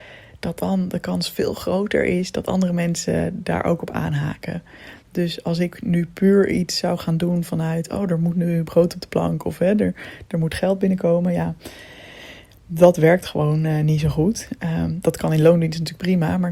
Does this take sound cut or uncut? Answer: uncut